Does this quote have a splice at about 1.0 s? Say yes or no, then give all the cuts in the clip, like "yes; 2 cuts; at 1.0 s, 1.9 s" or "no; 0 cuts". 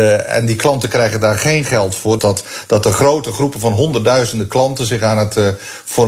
no; 1 cut; at 2.2 s